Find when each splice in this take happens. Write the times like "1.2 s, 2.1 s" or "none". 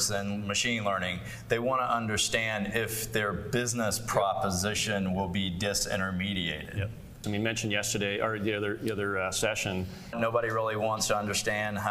7.2 s, 10.1 s